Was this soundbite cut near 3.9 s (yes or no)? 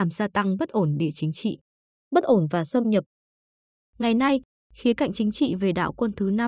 no